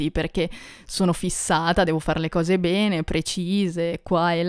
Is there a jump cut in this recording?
no; 0 cuts

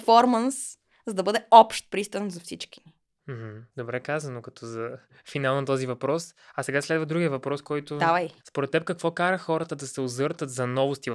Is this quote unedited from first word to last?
no; 1 cut; at 8.4 s

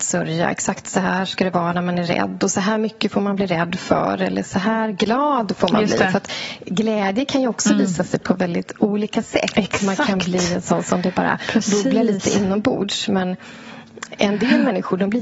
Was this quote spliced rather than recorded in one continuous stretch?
no; 0 cuts

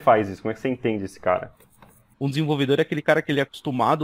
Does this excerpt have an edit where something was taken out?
yes; 1 cut; at 2.1 s

